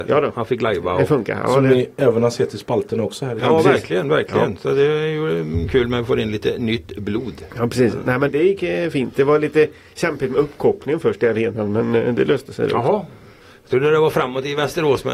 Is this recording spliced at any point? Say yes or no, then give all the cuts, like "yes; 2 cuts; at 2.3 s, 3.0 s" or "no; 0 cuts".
yes; 1 cut; at 8.3 s